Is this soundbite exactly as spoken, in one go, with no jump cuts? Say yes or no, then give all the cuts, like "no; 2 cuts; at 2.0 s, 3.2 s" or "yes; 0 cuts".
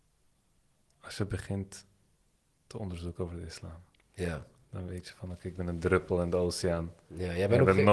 yes; 0 cuts